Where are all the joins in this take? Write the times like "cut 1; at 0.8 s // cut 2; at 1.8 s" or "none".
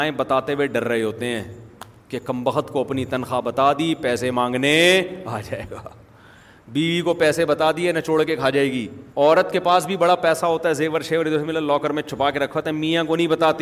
cut 1; at 9.1 s